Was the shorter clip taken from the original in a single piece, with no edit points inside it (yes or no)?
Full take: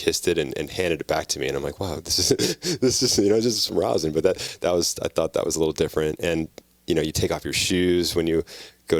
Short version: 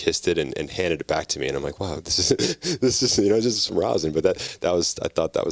yes